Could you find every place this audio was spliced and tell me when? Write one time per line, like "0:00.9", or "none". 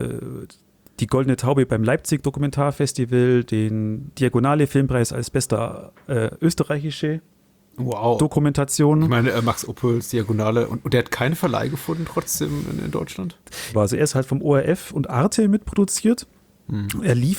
0:13.7